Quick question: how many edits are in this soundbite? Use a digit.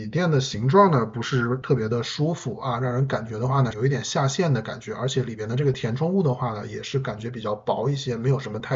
1